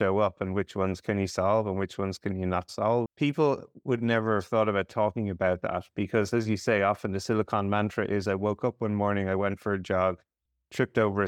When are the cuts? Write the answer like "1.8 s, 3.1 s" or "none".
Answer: 3.1 s

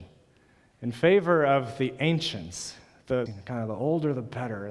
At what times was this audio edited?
3.3 s

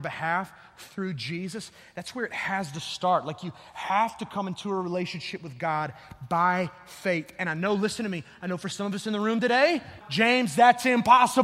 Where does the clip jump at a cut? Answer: 10.0 s

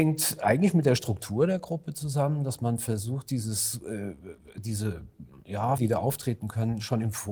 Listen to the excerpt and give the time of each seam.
5.8 s

